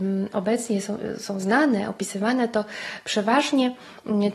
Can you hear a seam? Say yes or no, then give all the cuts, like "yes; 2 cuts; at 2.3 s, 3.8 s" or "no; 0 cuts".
no; 0 cuts